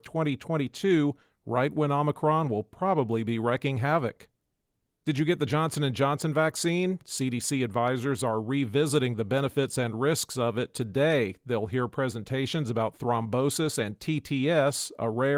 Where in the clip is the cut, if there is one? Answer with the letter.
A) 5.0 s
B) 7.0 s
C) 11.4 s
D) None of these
D